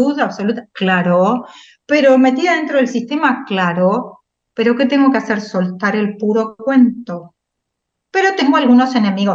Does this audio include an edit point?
no; 0 cuts

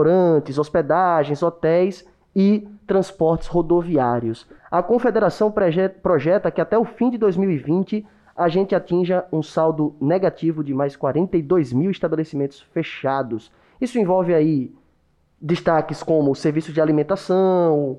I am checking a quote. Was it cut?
yes; 1 cut; at 4.6 s

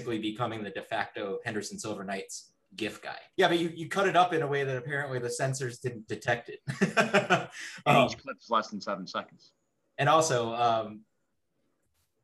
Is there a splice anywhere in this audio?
yes; 1 cut; at 3.3 s

